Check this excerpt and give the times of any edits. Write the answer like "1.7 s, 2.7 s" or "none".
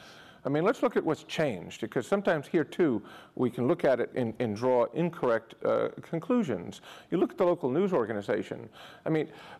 4.1 s